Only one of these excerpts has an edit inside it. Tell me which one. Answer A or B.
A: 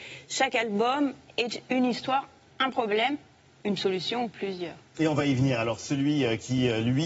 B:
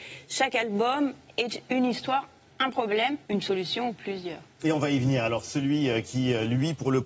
B